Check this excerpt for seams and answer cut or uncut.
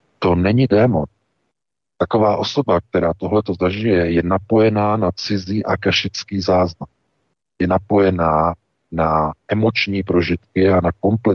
uncut